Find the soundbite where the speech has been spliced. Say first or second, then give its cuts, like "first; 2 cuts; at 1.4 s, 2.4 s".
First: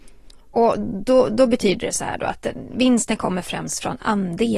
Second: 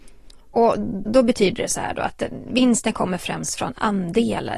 second; 1 cut; at 1.1 s